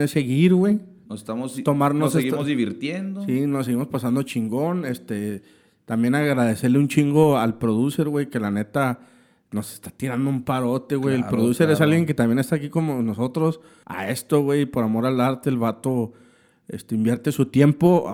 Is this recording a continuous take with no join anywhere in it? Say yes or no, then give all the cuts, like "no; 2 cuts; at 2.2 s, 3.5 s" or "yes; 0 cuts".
no; 1 cut; at 13.8 s